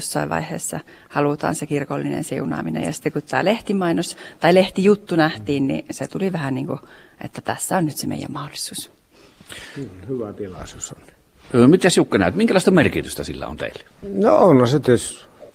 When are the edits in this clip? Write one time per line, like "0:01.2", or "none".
none